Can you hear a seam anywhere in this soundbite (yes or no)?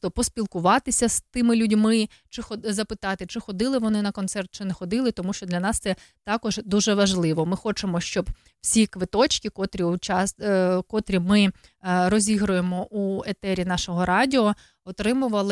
no